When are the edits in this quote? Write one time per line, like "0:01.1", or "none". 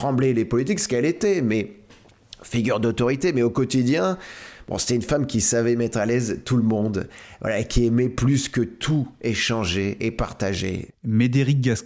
0:10.9